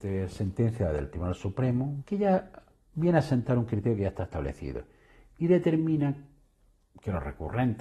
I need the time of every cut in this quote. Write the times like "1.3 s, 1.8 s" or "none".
2.0 s